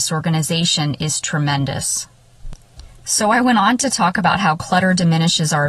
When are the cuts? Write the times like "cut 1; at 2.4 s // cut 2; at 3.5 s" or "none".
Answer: none